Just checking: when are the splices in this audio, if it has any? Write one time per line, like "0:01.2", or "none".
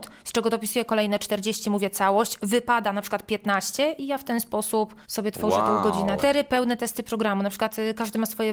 0:05.0
0:06.2